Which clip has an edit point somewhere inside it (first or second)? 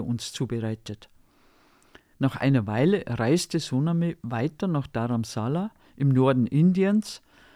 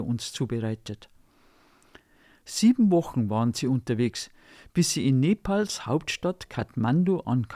first